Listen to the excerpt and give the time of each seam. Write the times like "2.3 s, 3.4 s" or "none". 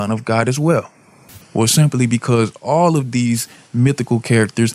1.4 s